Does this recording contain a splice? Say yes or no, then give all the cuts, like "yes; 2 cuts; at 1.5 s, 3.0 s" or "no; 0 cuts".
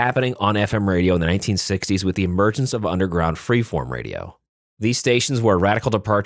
no; 0 cuts